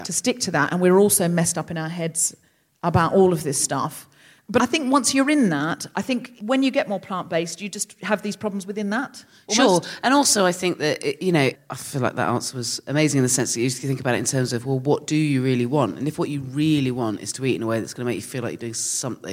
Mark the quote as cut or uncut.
cut